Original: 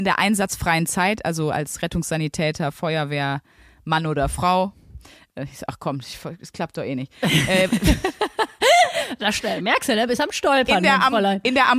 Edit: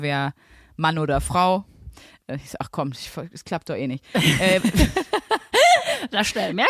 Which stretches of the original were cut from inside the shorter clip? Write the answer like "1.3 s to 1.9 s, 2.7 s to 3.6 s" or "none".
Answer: none